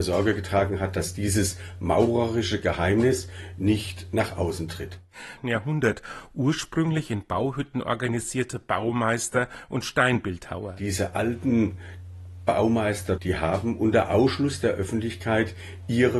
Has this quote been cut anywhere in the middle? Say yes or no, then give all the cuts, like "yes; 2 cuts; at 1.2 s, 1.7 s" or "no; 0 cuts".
yes; 2 cuts; at 5.4 s, 13.2 s